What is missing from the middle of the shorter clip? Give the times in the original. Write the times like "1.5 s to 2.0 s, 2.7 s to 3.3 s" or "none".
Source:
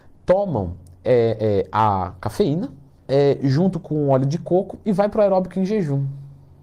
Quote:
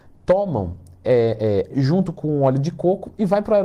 1.7 s to 3.4 s